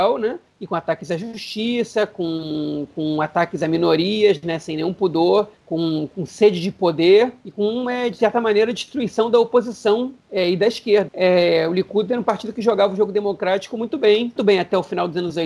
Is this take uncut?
no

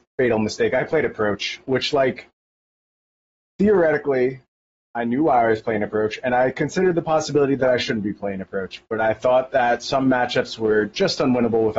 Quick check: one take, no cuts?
yes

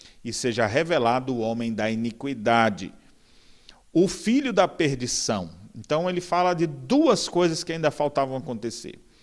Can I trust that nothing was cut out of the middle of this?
yes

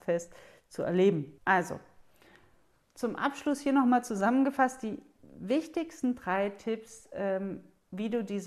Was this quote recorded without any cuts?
no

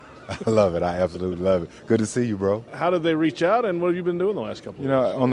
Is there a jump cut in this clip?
yes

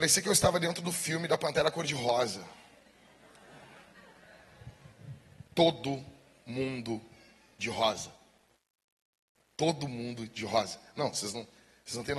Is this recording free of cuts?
yes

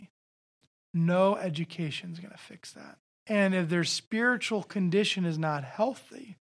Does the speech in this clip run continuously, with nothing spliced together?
no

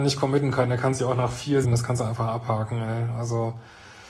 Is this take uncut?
no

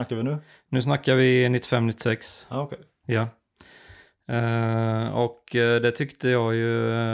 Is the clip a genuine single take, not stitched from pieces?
yes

